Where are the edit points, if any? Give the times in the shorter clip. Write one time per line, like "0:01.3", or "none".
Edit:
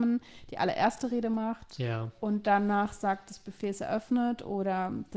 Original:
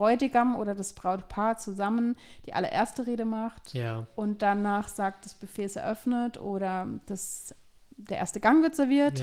none